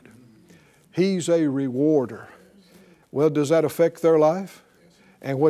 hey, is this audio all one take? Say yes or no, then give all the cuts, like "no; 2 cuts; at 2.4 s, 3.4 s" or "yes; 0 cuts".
no; 1 cut; at 3.0 s